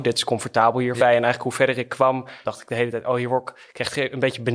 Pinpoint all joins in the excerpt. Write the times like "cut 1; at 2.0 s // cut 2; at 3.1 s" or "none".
cut 1; at 1.0 s // cut 2; at 2.4 s